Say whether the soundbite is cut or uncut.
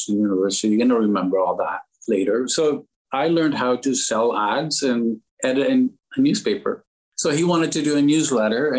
uncut